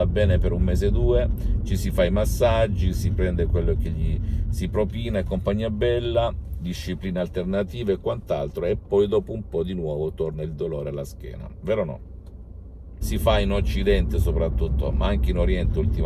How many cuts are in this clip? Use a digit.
1